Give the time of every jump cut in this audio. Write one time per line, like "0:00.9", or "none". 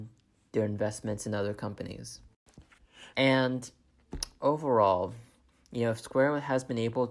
0:03.1